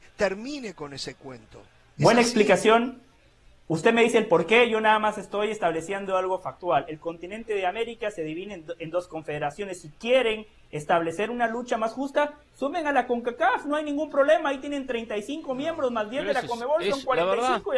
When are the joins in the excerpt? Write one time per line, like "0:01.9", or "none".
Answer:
none

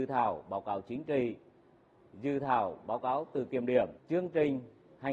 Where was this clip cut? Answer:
0:04.0

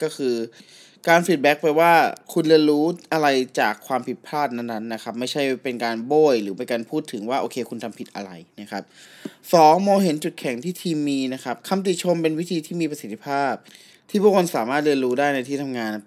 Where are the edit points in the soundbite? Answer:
none

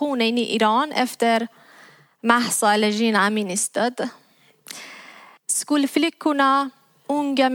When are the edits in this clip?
0:05.4

